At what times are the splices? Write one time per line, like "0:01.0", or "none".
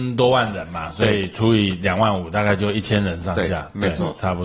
none